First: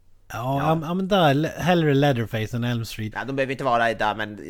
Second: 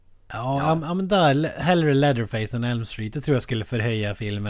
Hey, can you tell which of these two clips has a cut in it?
first; 1 cut; at 3.1 s

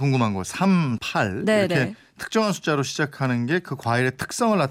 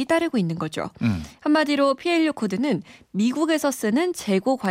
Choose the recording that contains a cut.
first; 1 cut; at 1.0 s

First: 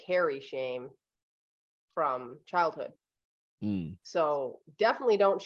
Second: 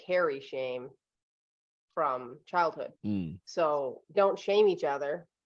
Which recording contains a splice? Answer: second; 2 cuts; at 3.0 s, 4.1 s

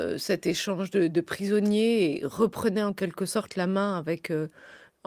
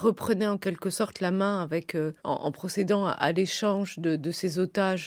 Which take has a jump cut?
second; 1 cut; at 2.2 s

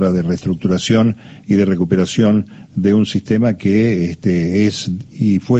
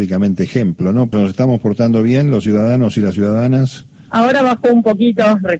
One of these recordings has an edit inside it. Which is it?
second; 1 cut; at 1.1 s

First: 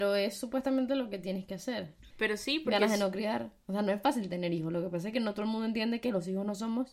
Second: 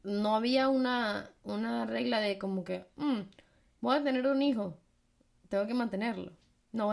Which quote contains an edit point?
first; 1 cut; at 2.1 s

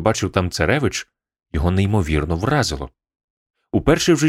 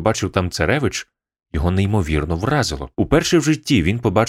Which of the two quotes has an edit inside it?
second; 1 cut; at 2.9 s

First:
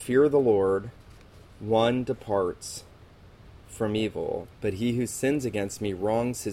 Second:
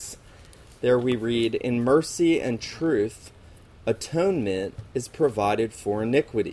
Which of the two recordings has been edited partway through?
first; 1 cut; at 4.4 s

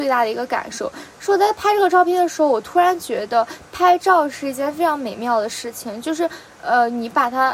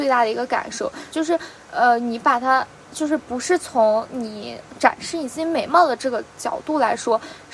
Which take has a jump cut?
second; 1 cut; at 1.1 s

